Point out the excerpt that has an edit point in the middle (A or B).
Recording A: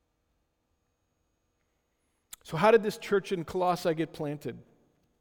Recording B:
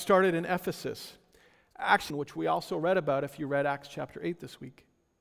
B